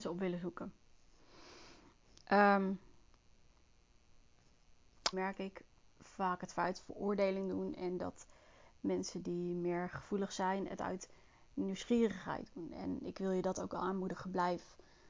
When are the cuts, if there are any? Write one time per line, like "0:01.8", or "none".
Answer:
0:05.1